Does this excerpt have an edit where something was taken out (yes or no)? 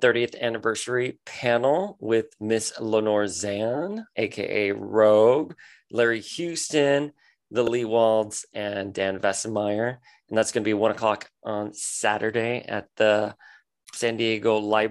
no